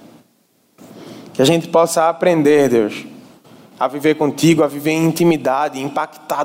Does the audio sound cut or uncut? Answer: uncut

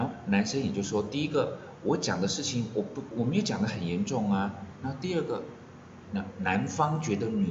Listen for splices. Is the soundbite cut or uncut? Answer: cut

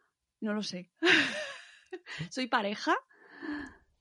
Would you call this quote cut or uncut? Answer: uncut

